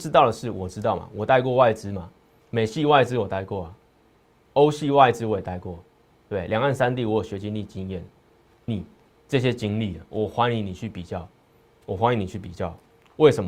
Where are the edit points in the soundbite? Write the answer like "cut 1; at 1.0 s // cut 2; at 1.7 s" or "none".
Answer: cut 1; at 8.7 s